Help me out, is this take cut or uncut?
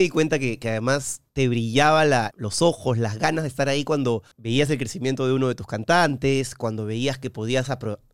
cut